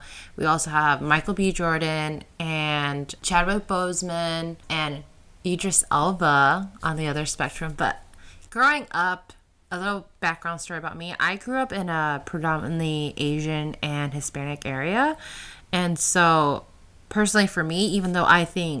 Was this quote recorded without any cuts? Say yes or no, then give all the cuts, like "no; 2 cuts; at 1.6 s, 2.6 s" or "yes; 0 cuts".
yes; 0 cuts